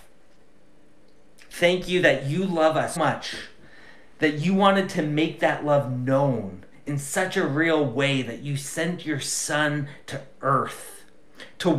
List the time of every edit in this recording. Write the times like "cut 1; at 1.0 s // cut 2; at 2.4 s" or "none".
cut 1; at 1.5 s // cut 2; at 3.0 s